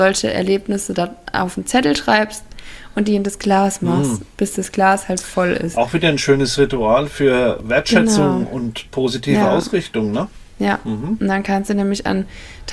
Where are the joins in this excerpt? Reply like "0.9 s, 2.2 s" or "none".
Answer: 10.5 s